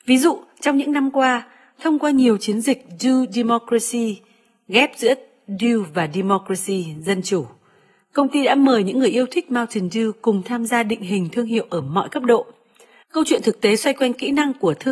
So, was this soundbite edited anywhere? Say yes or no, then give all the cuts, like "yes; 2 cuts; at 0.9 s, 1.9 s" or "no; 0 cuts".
yes; 1 cut; at 13.0 s